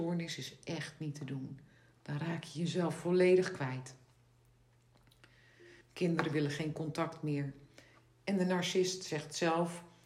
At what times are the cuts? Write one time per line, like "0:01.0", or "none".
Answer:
0:05.8

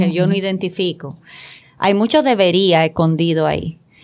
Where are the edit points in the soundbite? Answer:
0:01.6

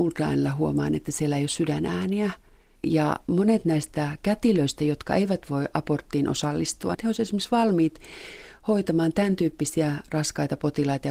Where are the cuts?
0:02.8
0:06.9

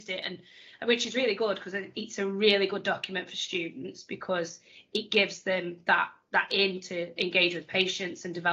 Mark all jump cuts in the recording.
none

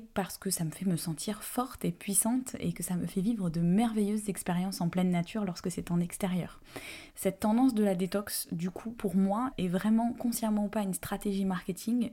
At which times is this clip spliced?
0:07.1
0:09.5

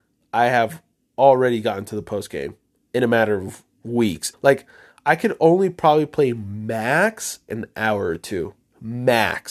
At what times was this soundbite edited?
0:04.3
0:07.5

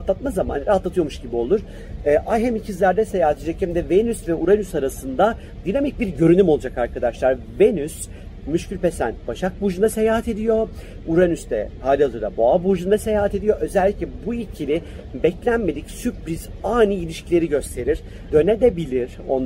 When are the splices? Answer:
0:18.3

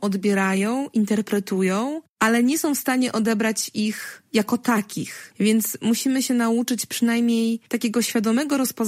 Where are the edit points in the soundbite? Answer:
none

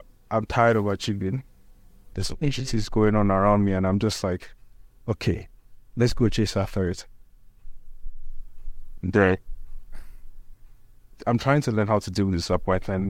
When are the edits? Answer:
0:02.1
0:09.0
0:11.1

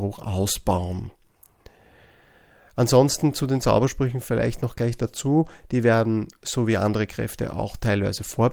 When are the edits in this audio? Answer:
none

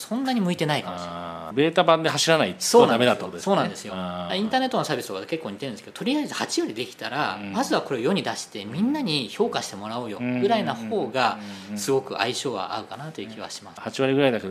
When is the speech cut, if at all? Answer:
none

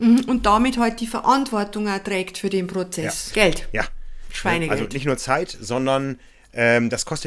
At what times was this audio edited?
0:03.3

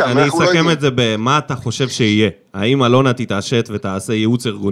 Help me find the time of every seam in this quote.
none

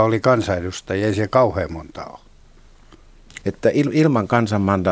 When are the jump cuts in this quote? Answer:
0:03.4

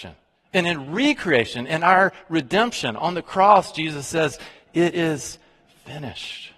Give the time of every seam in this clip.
none

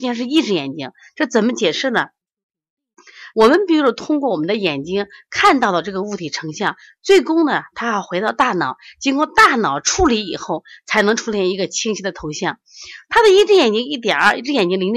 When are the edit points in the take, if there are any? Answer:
0:03.3

